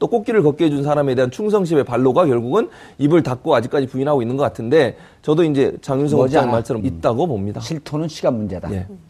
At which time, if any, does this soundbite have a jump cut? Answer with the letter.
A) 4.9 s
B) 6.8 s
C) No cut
B